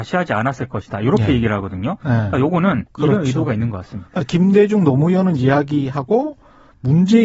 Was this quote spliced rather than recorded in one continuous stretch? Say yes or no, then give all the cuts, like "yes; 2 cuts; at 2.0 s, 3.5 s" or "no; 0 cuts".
yes; 1 cut; at 2.9 s